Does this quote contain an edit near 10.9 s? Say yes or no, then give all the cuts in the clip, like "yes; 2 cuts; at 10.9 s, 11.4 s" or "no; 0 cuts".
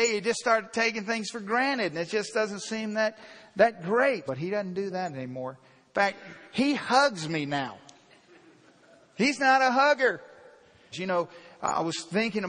yes; 2 cuts; at 4.3 s, 10.9 s